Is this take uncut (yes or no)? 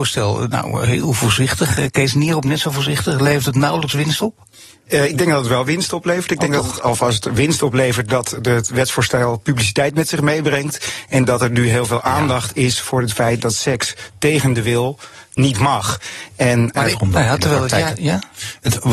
no